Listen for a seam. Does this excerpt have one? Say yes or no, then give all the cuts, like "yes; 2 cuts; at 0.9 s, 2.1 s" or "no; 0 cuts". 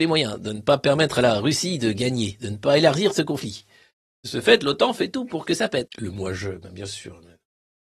yes; 1 cut; at 5.9 s